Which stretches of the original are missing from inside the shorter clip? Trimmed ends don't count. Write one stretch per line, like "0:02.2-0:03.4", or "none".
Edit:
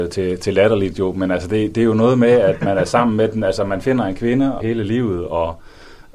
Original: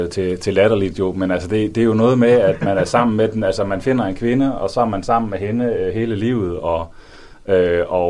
0:04.6-0:05.9

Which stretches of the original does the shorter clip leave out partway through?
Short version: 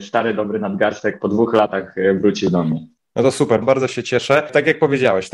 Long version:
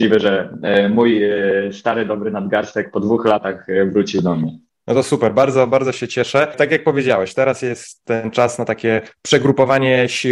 0:05.3-0:05.7

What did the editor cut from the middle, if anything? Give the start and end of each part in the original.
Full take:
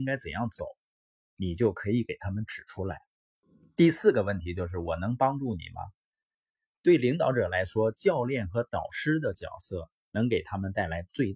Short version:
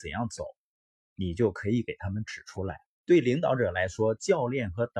0:03.2-0:06.8

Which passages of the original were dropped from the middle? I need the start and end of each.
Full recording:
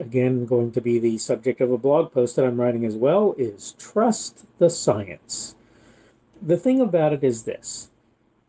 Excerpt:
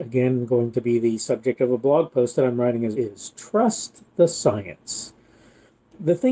0:02.9-0:03.4

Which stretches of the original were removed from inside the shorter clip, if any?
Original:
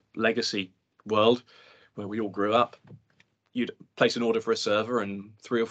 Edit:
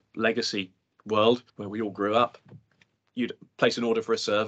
0:01.5-0:01.9

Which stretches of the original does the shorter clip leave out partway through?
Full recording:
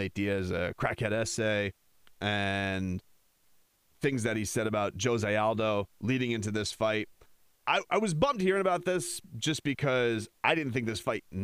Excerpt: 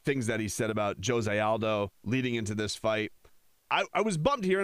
none

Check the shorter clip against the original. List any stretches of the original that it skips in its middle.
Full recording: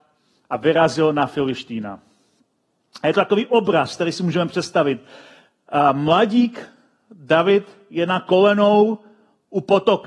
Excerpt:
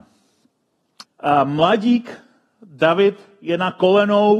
0:03.0-0:05.5

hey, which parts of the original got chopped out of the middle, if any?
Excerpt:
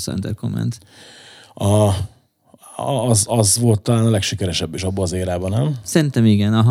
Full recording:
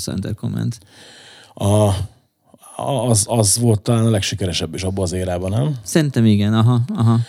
none

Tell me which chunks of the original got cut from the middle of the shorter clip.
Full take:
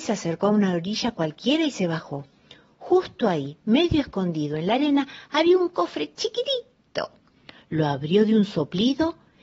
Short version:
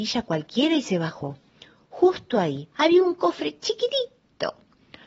0:03.6-0:05.3

